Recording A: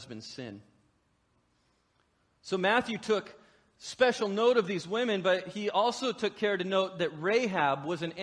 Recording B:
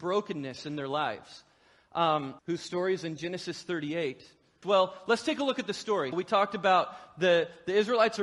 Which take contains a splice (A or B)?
B